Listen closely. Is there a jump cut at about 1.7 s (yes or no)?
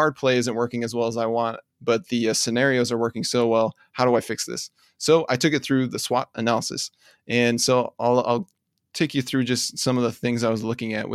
yes